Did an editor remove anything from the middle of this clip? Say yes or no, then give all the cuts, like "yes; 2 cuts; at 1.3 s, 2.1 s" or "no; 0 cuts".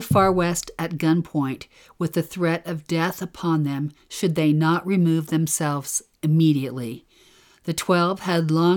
no; 0 cuts